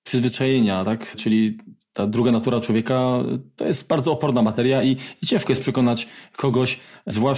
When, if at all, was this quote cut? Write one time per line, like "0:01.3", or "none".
none